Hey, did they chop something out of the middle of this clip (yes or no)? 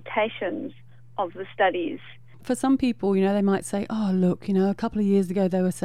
yes